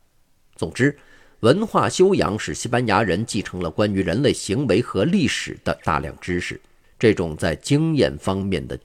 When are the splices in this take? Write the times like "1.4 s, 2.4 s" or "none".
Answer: 6.8 s